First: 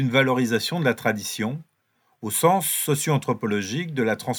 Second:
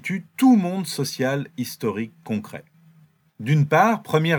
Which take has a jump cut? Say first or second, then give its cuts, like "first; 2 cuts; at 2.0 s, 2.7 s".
second; 1 cut; at 3.3 s